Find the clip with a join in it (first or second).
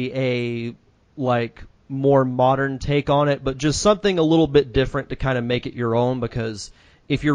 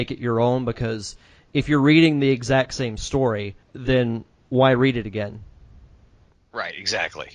second